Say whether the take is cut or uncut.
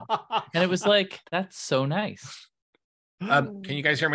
cut